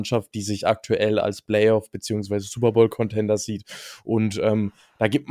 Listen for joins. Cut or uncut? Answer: uncut